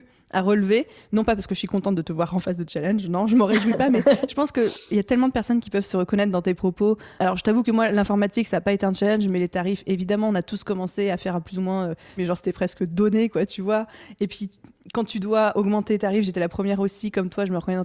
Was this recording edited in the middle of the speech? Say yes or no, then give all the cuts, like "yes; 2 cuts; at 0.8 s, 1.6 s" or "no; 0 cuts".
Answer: yes; 1 cut; at 12.2 s